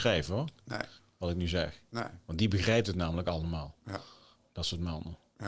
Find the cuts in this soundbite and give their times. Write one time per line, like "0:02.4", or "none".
none